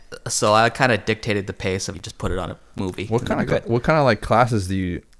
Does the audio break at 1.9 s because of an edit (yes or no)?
yes